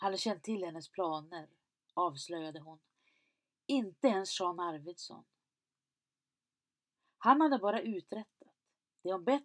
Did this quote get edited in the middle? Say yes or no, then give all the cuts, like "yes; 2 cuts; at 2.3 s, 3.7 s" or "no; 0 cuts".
no; 0 cuts